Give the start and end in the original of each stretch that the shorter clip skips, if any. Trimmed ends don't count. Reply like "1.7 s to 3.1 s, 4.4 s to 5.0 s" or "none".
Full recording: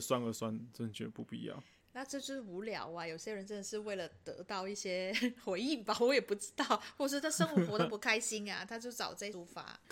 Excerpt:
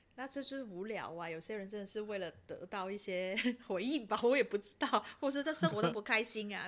7.5 s to 7.7 s

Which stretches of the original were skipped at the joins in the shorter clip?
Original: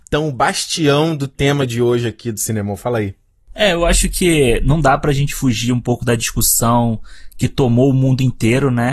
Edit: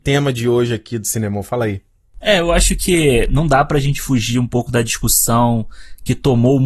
none

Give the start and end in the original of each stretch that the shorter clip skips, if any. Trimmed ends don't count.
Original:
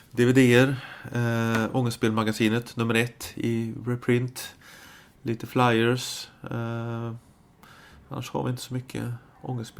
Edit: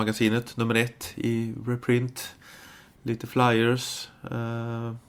none

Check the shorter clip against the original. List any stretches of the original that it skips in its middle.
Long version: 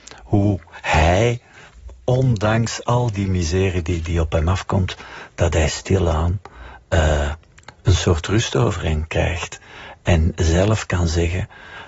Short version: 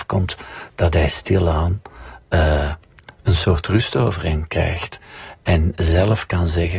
none

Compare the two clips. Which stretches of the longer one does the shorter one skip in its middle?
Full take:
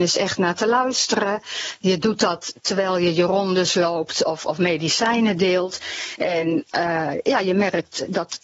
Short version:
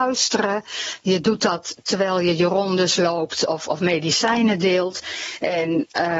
none

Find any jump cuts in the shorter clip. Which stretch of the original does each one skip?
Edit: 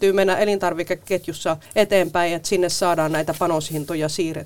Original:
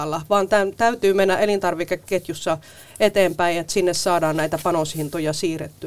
2.7 s to 2.9 s

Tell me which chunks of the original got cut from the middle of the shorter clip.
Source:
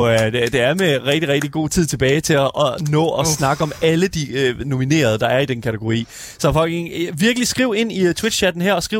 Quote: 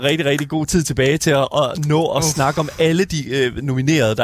none

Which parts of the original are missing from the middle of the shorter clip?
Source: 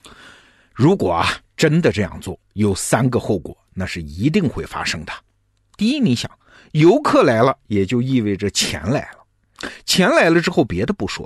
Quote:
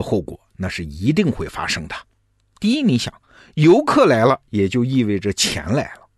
none

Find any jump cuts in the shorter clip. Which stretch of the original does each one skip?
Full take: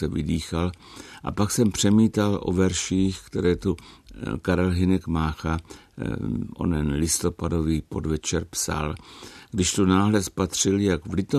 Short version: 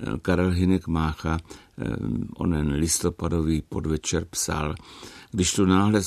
none

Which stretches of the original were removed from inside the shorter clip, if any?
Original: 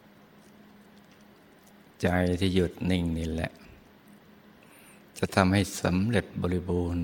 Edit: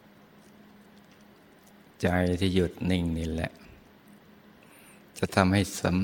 none

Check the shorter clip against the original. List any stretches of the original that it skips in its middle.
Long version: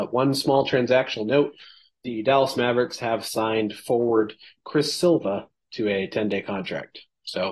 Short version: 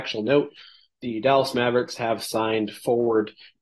none

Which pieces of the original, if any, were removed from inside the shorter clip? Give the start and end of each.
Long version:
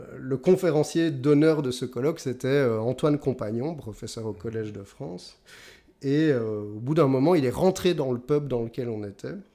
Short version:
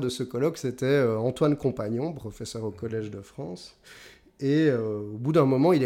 none

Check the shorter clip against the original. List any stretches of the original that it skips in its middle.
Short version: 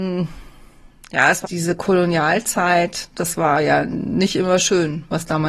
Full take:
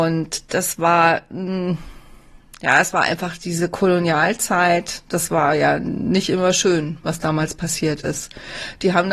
2.9 s to 3.4 s

